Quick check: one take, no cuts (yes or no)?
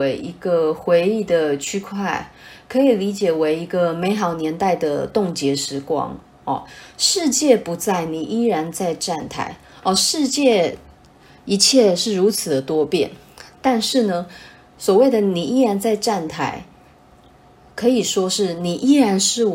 yes